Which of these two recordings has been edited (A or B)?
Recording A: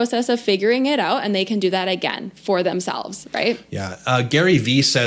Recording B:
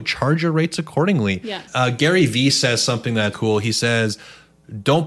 B